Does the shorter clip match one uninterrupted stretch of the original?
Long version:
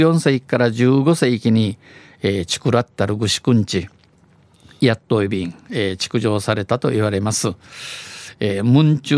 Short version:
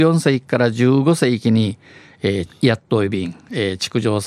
no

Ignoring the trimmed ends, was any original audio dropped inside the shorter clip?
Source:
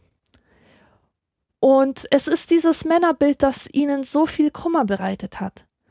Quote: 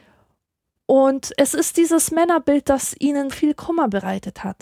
yes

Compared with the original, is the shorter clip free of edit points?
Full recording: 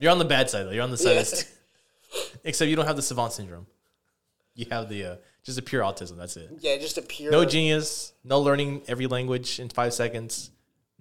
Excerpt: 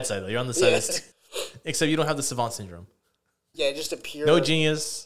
no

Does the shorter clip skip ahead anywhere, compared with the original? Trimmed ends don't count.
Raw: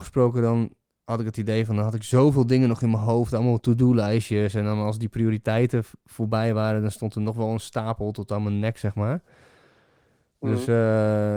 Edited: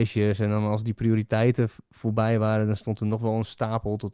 no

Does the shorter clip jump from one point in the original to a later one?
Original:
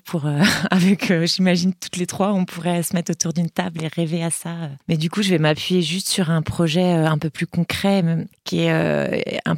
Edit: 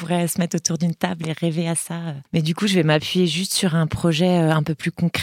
no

